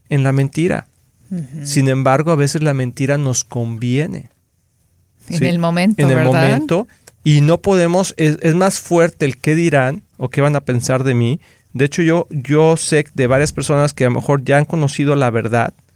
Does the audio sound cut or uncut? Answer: uncut